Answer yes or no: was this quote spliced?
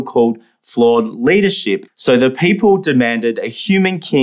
yes